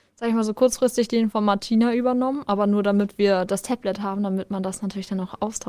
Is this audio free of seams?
yes; 0 cuts

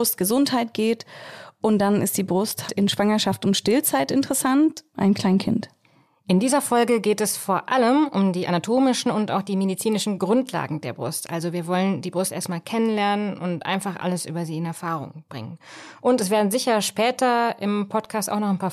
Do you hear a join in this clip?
yes; 2 cuts; at 2.7 s, 4.9 s

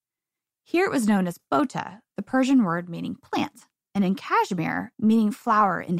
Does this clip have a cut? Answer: yes; 2 cuts; at 3.8 s, 4.9 s

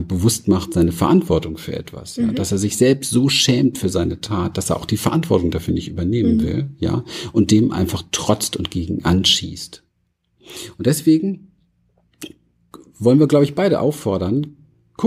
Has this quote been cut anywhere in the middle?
no; 0 cuts

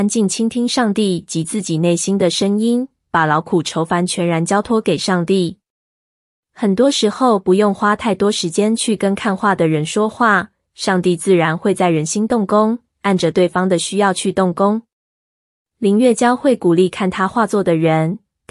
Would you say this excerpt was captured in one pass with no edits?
yes; 0 cuts

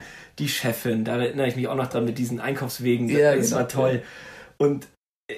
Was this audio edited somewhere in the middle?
no; 0 cuts

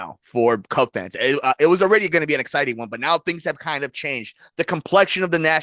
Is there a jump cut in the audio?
no; 0 cuts

